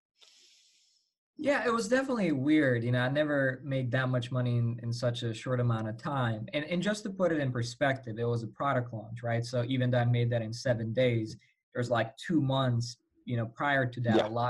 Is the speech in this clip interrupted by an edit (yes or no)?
no